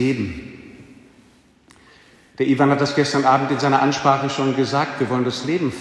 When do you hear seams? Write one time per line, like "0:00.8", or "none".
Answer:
none

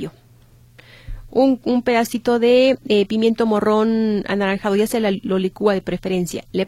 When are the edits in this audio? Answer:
none

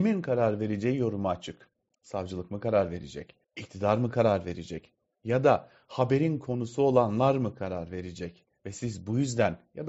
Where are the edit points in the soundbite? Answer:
0:03.4

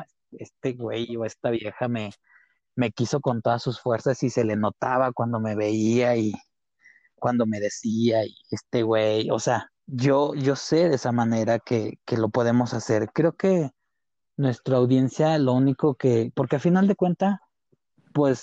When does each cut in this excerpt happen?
0:09.8
0:16.3

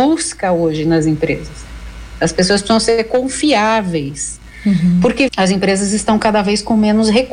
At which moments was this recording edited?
0:05.3

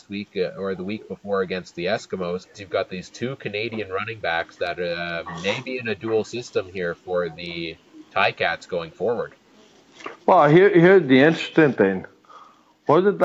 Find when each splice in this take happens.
0:02.5

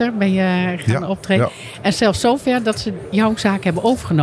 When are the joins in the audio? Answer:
none

